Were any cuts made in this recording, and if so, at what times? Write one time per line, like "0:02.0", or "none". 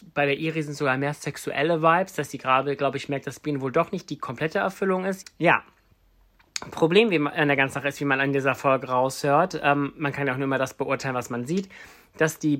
0:05.2